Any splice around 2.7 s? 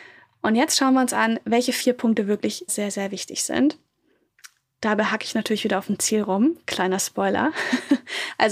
yes; 1 cut; at 2.7 s

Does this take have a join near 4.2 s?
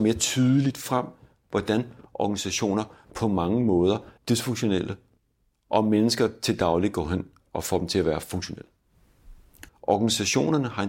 yes; 2 cuts; at 4.2 s, 9.7 s

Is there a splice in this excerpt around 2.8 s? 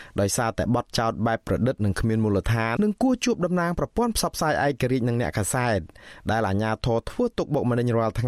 yes; 1 cut; at 2.8 s

